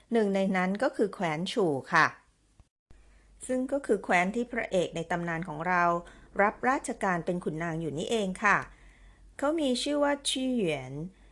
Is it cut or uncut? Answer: uncut